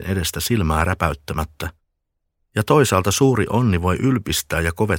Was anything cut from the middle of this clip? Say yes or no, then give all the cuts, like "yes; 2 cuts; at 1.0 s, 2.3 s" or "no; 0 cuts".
no; 0 cuts